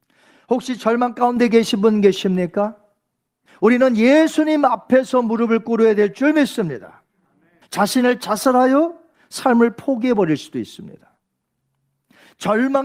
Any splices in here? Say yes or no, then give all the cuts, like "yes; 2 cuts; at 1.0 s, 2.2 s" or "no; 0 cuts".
yes; 2 cuts; at 3.5 s, 7.6 s